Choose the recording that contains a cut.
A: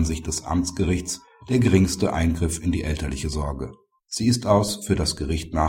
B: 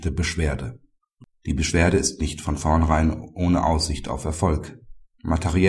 A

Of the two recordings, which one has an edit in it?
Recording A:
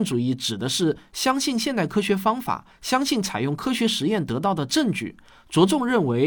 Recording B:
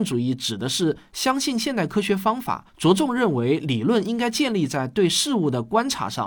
B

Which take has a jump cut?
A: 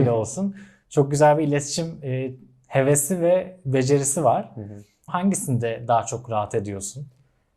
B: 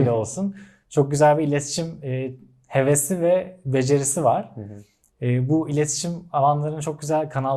A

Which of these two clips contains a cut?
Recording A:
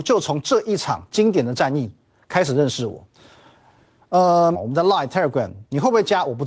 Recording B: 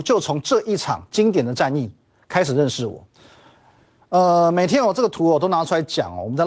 A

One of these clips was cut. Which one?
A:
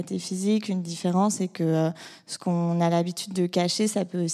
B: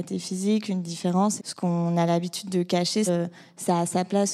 B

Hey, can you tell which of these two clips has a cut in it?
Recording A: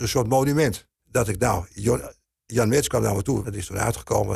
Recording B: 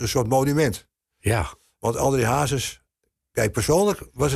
A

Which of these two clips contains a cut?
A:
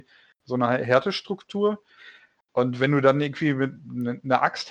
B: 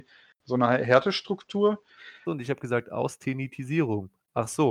B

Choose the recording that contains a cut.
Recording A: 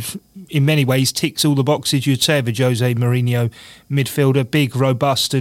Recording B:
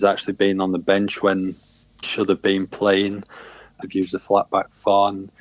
B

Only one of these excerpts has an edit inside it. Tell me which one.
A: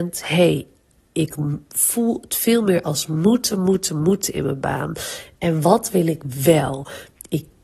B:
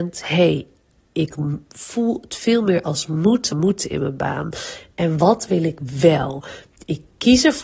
B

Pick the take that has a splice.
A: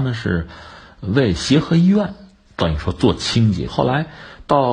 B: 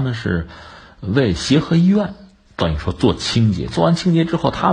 A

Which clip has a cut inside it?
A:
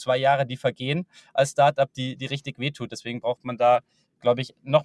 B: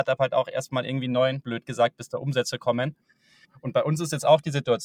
B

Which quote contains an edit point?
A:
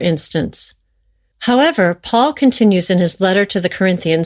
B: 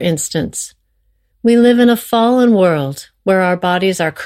A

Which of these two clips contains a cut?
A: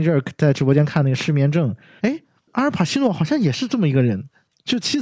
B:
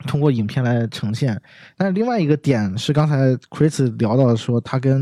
A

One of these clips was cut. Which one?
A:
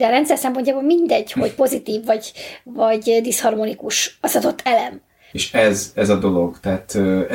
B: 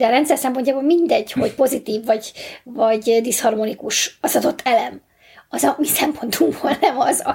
A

